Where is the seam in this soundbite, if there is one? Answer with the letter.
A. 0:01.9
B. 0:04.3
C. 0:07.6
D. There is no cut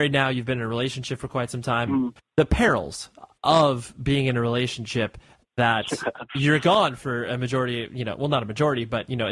A